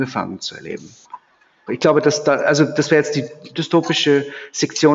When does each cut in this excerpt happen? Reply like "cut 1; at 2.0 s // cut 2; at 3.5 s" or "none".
cut 1; at 1.7 s // cut 2; at 3.5 s